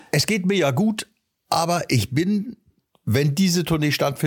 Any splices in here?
no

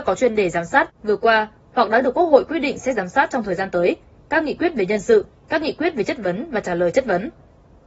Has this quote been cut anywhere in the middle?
no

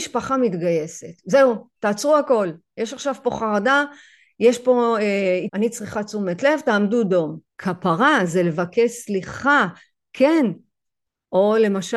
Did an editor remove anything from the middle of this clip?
yes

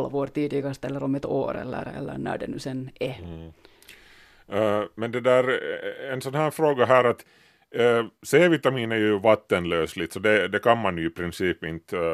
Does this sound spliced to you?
no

